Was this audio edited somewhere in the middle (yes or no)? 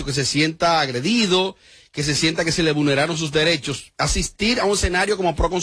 no